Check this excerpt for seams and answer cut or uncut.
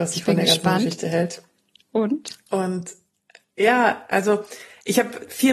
uncut